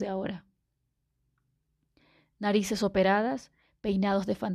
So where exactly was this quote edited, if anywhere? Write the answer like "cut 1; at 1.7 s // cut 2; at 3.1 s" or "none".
none